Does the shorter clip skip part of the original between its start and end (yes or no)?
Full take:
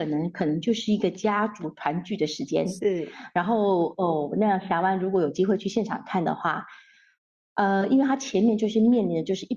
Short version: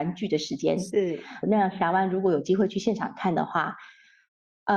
yes